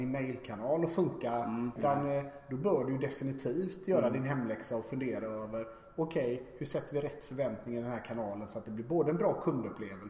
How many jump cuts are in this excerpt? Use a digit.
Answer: 1